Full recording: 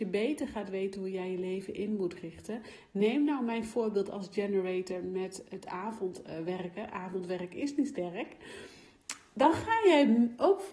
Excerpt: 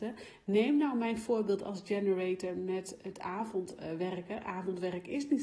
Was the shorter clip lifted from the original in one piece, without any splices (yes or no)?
yes